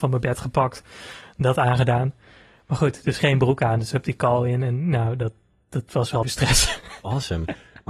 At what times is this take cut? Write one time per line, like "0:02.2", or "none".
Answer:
0:06.2

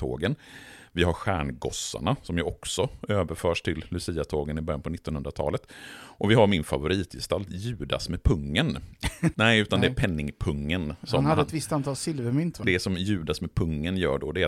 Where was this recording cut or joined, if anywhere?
0:09.3
0:12.6

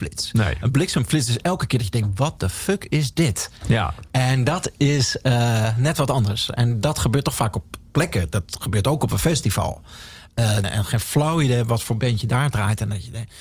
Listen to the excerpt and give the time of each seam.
0:10.6

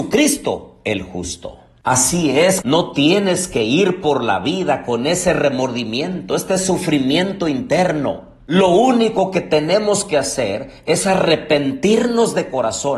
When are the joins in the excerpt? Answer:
0:02.6

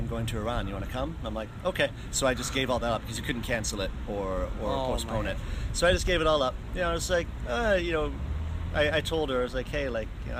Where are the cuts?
none

